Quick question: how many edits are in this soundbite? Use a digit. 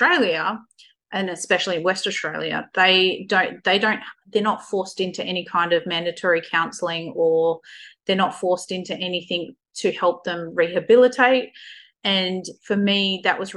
1